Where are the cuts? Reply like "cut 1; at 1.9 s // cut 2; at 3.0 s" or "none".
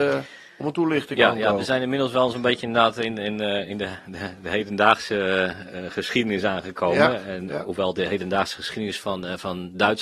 none

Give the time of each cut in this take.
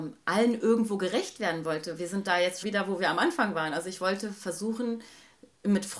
cut 1; at 2.6 s

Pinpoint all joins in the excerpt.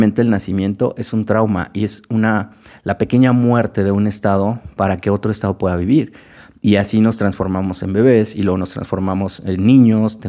none

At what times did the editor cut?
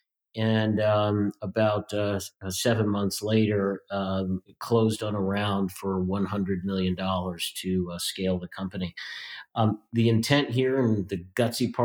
cut 1; at 4.5 s // cut 2; at 9.9 s

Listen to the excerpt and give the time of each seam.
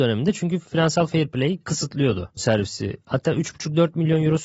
cut 1; at 2.4 s

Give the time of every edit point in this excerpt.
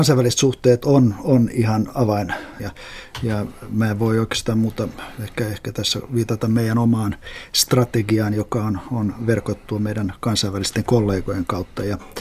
cut 1; at 2.6 s

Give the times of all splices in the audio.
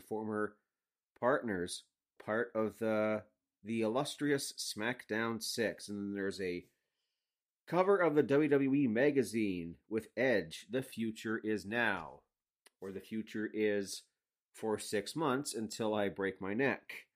cut 1; at 2.2 s

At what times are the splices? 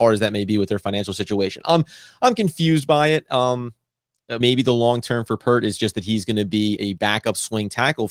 cut 1; at 4.4 s // cut 2; at 6.8 s

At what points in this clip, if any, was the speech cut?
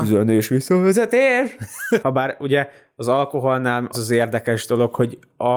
cut 1; at 2.0 s // cut 2; at 3.9 s

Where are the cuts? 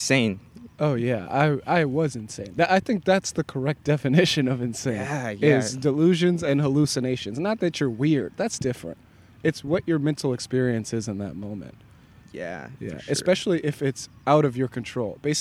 none

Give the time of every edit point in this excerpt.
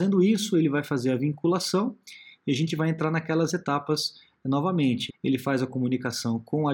cut 1; at 5.1 s

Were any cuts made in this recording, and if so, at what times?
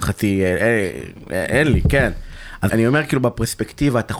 cut 1; at 2.7 s

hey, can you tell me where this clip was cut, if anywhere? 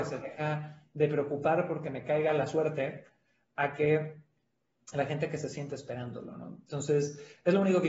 none

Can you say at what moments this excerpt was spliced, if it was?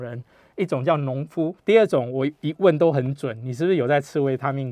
cut 1; at 1.6 s

